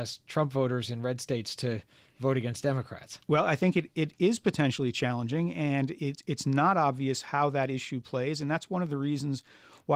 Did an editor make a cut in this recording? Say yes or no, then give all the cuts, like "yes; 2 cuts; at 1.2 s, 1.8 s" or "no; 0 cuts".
no; 0 cuts